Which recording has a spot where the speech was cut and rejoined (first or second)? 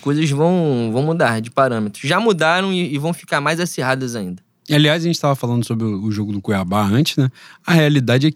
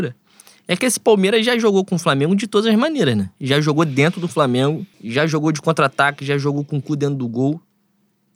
second